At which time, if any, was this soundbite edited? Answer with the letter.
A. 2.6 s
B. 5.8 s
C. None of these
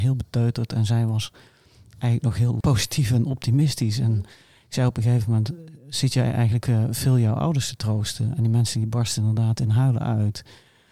A